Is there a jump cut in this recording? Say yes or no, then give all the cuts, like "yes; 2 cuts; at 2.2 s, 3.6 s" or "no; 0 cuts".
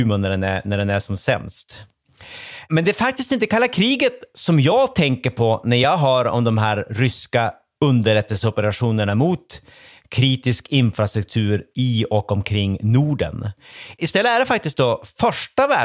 no; 0 cuts